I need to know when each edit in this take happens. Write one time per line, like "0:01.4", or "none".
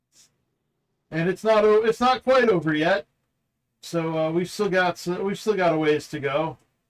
none